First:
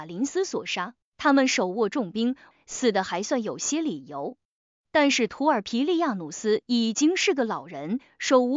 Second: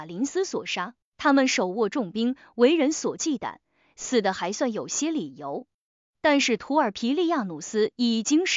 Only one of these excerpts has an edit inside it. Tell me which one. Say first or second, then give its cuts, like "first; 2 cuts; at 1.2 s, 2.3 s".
first; 1 cut; at 2.5 s